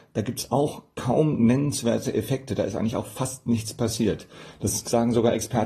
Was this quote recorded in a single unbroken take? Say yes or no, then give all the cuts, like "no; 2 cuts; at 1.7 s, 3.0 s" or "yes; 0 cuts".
yes; 0 cuts